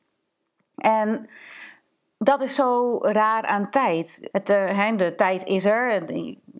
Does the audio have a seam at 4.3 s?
yes; 1 cut; at 4.3 s

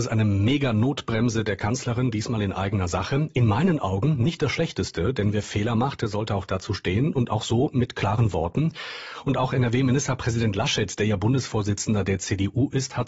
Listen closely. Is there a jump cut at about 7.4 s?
no; 0 cuts

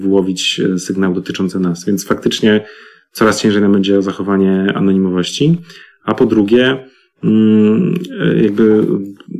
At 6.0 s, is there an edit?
no; 0 cuts

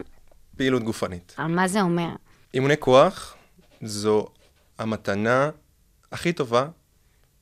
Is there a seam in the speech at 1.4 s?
yes; 1 cut; at 1.4 s

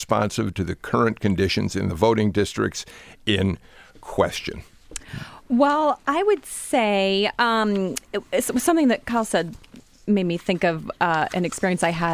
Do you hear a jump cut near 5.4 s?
no; 0 cuts

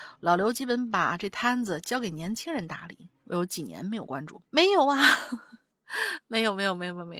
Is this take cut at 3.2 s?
no; 2 cuts; at 4.4 s, 5.7 s

